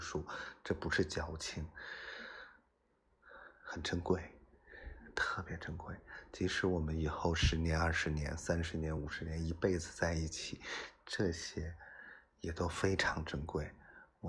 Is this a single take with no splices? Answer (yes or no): yes